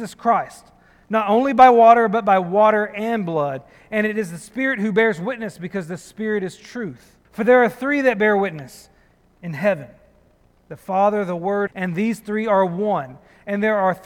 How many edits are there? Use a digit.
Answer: 2